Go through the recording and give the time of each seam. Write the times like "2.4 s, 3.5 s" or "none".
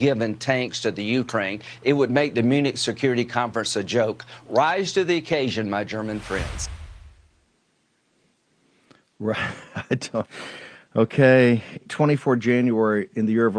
11.8 s